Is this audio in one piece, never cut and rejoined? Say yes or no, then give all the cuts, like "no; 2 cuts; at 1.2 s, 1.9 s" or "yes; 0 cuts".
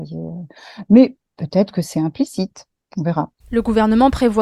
yes; 0 cuts